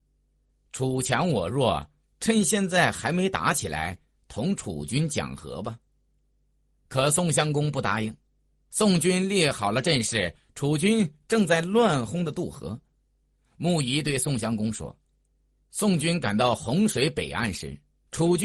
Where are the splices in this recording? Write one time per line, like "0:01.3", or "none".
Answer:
0:12.1
0:15.6